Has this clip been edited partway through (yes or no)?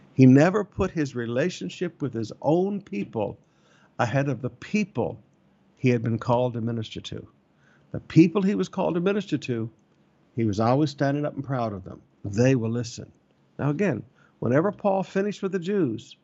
yes